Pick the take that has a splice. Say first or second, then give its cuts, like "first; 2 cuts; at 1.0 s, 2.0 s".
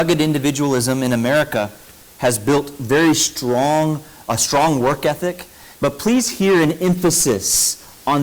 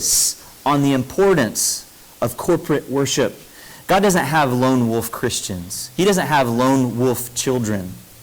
first; 1 cut; at 5.7 s